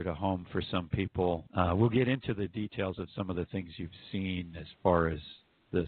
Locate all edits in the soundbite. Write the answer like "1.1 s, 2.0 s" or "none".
1.5 s